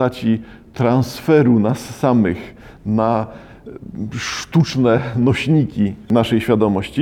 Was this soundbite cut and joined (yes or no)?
no